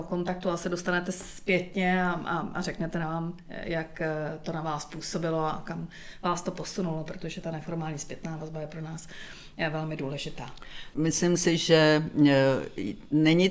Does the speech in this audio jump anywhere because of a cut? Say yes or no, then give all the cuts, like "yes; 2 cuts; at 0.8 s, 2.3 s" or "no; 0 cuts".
yes; 1 cut; at 10.9 s